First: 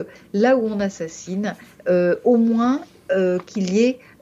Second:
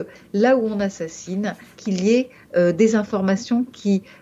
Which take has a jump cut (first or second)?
second